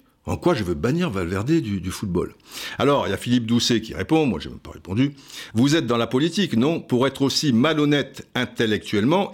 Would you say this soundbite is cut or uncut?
uncut